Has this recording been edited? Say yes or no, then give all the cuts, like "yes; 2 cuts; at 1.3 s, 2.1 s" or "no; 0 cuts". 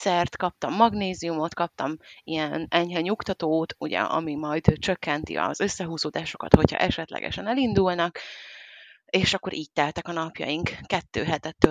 no; 0 cuts